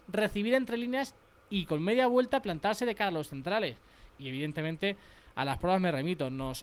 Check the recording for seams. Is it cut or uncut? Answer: cut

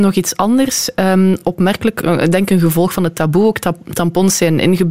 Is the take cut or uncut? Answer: uncut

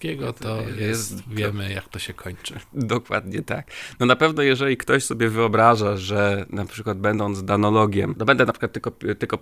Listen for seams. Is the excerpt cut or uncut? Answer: uncut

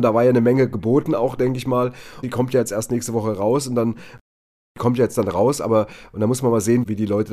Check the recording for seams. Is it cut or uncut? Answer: cut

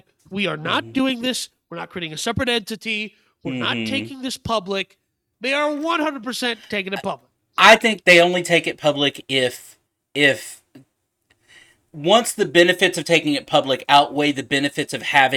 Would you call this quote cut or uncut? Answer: cut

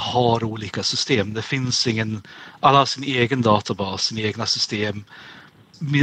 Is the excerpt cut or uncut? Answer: uncut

